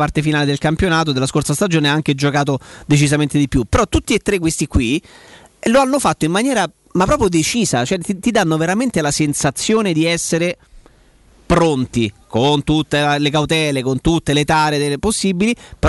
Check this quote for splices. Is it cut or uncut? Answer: uncut